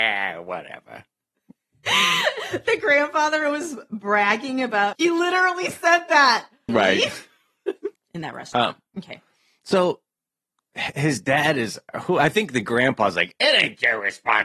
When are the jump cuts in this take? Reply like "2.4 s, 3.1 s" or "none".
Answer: 4.9 s, 6.7 s, 7.9 s